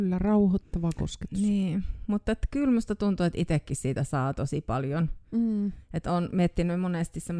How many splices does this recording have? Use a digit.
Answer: 0